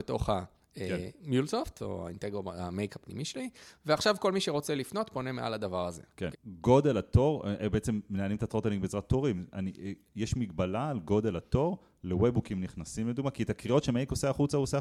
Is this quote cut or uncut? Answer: cut